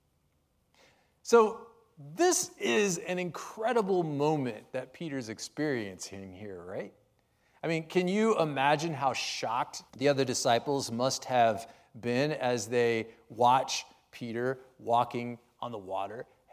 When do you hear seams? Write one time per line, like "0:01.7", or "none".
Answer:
0:09.9